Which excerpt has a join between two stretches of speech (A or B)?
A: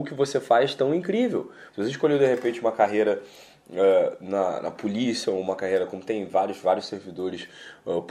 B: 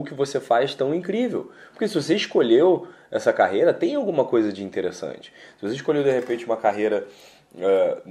A